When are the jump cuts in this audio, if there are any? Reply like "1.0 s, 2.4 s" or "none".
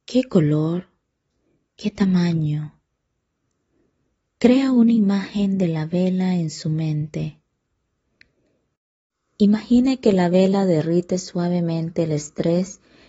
none